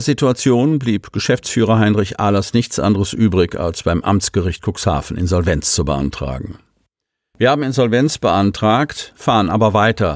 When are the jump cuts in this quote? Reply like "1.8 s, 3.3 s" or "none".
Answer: none